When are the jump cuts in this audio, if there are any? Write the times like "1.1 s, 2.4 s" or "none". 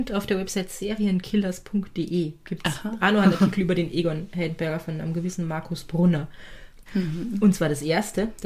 6.9 s

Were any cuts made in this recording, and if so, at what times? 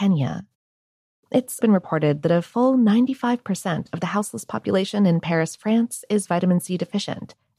1.6 s

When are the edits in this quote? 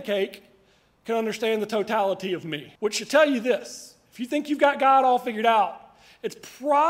2.8 s

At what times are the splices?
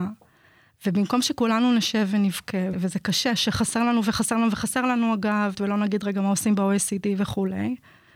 2.7 s, 5.5 s

